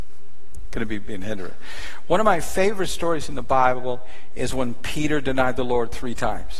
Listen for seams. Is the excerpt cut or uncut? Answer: uncut